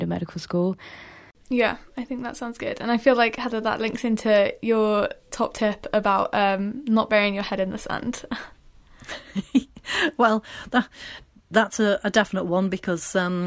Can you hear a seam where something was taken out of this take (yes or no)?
no